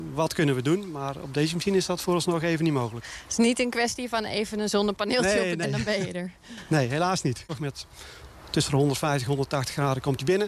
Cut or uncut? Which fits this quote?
cut